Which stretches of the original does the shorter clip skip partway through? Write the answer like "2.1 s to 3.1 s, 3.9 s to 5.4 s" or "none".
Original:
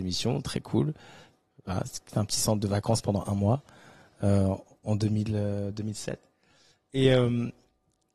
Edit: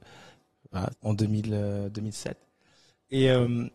1.8 s to 4.7 s